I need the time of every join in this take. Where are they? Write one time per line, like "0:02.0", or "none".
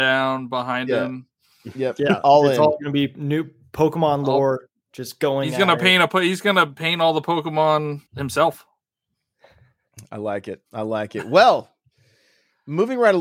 0:08.1